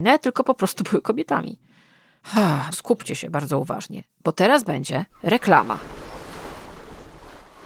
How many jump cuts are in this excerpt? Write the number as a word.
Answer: one